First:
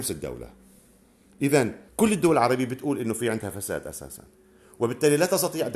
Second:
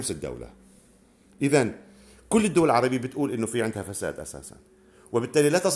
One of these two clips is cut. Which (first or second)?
first